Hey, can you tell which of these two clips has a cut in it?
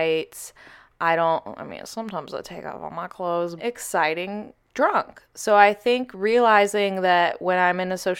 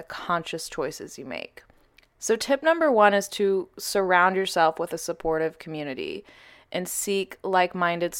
first; 1 cut; at 3.6 s

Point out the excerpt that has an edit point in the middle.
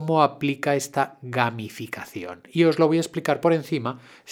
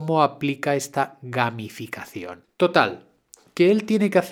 second; 1 cut; at 2.4 s

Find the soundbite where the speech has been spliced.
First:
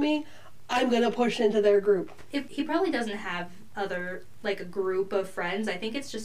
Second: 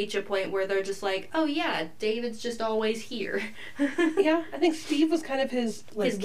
first; 1 cut; at 2.5 s

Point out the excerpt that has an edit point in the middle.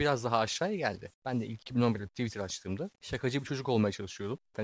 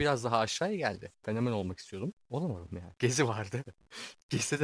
second; 2 cuts; at 1.1 s, 3.0 s

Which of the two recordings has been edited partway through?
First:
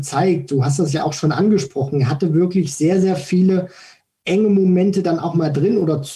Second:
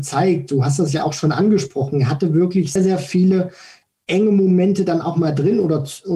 second; 1 cut; at 2.8 s

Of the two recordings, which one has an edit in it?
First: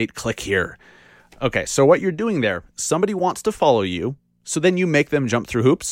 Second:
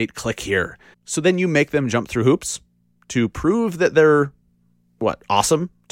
second; 1 cut; at 0.9 s

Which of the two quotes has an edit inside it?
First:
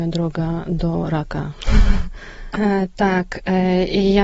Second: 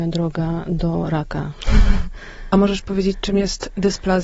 first; 1 cut; at 2.5 s

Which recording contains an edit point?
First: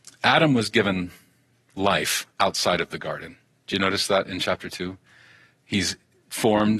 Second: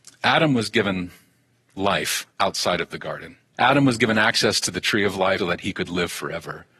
second; 2 cuts; at 3.5 s, 5.4 s

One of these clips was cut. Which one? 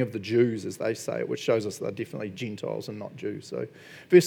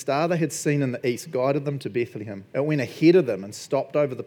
second; 1 cut; at 2.5 s

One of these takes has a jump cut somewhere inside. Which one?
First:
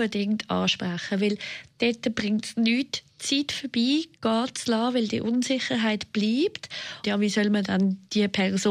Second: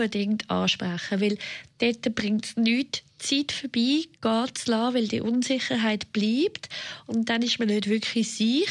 first; 1 cut; at 7.0 s

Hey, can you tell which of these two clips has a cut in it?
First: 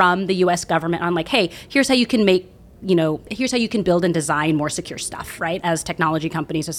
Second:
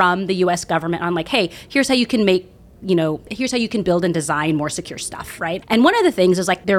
second; 1 cut; at 5.6 s

